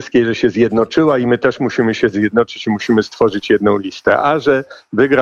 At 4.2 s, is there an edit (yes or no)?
no